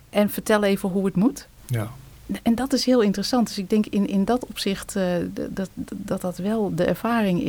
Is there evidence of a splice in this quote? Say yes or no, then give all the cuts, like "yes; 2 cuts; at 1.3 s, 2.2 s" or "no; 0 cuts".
no; 0 cuts